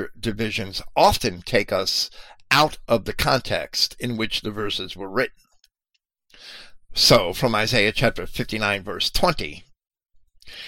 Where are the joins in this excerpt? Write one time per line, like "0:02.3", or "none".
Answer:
none